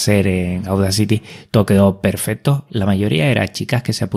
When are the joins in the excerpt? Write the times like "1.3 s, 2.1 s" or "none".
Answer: 2.7 s